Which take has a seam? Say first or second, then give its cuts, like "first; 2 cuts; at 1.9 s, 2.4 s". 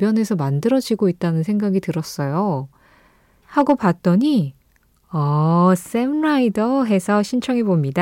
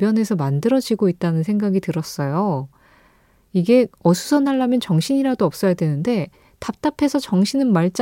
first; 1 cut; at 3.4 s